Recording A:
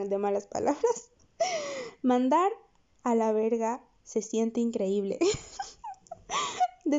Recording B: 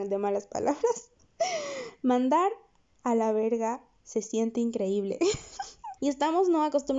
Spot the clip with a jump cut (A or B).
B